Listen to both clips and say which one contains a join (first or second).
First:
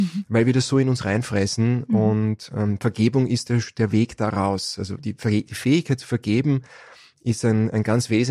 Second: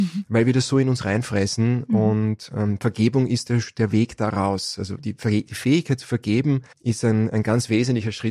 second